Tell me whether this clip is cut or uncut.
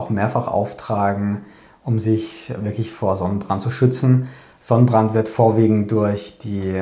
uncut